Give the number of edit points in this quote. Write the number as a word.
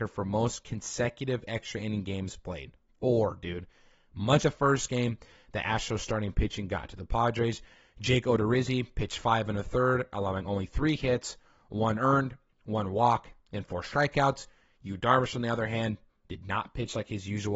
one